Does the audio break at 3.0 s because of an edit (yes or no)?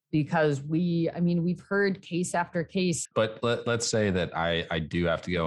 yes